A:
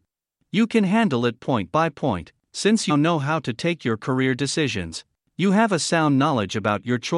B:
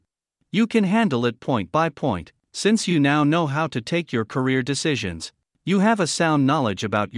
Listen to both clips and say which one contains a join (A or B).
A